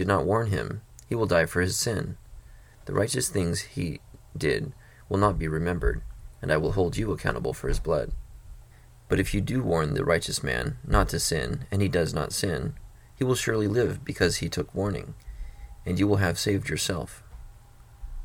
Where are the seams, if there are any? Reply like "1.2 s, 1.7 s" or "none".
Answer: none